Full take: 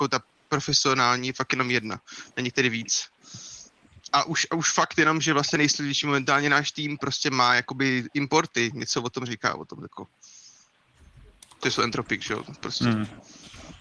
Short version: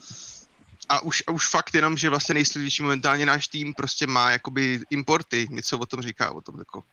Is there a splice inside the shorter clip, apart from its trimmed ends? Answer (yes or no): no